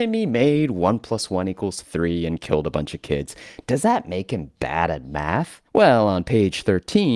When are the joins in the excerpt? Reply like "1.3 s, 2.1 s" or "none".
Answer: 5.7 s